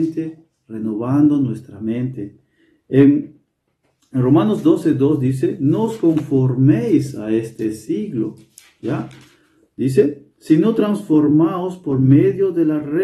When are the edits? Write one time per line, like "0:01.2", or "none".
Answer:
none